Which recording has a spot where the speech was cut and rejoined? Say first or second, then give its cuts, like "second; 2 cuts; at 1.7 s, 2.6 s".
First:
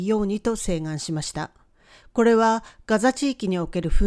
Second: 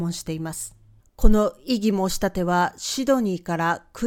second; 1 cut; at 1.0 s